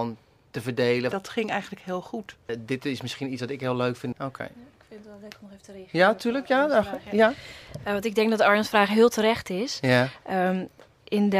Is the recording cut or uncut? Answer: cut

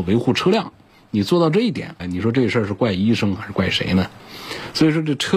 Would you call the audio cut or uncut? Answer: cut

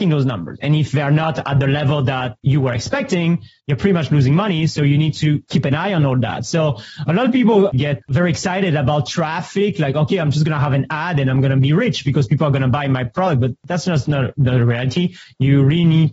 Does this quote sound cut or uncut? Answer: uncut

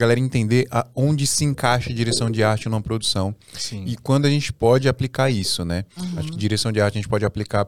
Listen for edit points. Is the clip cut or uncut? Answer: uncut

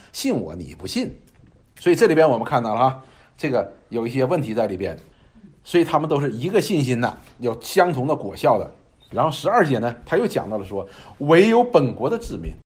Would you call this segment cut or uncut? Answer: uncut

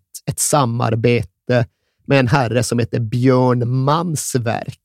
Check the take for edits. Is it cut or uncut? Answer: uncut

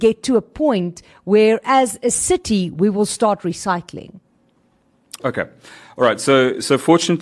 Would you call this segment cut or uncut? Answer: uncut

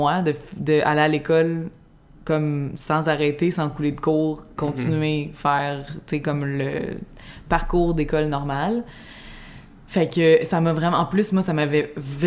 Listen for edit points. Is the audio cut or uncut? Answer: uncut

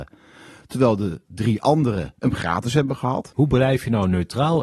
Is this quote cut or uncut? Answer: uncut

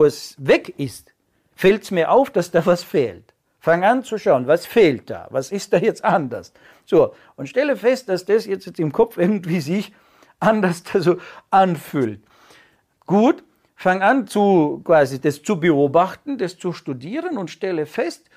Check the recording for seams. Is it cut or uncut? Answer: uncut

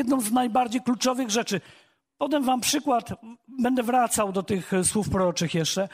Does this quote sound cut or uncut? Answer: uncut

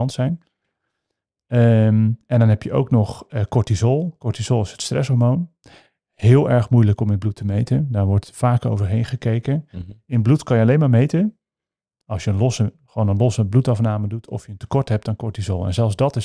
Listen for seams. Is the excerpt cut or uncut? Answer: uncut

